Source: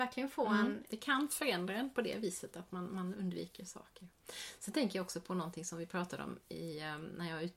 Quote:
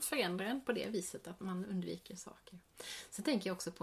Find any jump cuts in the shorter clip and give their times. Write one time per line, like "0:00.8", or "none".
0:01.4